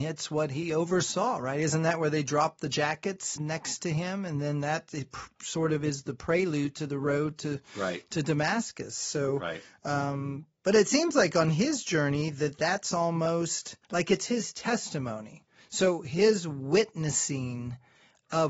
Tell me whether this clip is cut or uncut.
cut